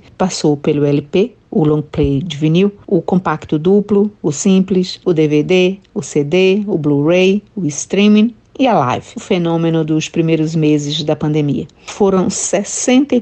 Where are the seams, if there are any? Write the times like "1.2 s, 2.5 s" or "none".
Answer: 5.0 s